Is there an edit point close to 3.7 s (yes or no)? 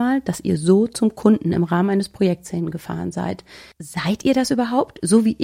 yes